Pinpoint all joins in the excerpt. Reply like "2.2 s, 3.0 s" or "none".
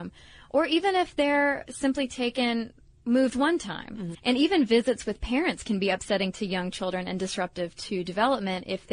4.1 s